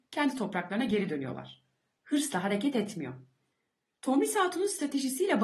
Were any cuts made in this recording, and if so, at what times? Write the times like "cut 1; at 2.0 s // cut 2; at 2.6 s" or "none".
cut 1; at 2.0 s

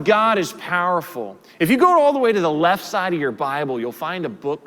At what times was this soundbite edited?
none

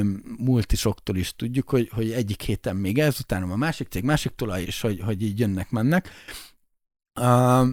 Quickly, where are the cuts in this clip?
cut 1; at 4.6 s

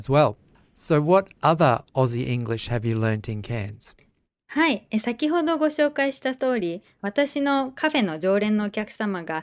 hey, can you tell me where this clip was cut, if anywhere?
none

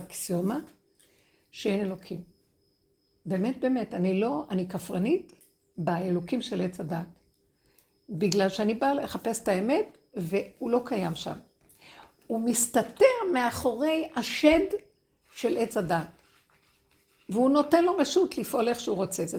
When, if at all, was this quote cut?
none

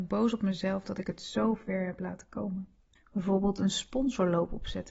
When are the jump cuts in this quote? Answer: cut 1; at 3.0 s

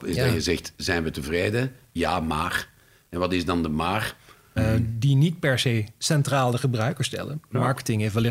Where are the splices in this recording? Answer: cut 1; at 4.6 s

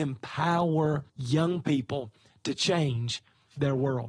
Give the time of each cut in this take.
cut 1; at 1.1 s

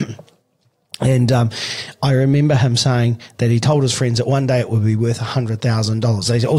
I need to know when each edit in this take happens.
none

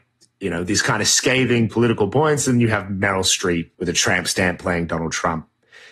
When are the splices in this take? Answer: cut 1; at 3.7 s

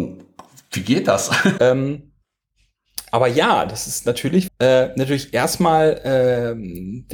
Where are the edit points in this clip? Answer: cut 1; at 1.6 s // cut 2; at 4.5 s

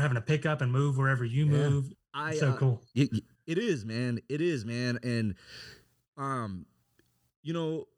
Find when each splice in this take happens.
cut 1; at 1.9 s

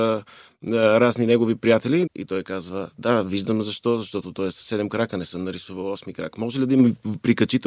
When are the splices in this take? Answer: cut 1; at 2.1 s

